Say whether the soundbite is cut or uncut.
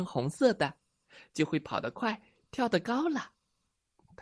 uncut